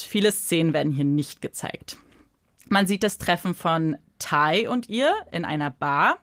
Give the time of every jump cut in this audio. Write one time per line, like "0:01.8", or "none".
none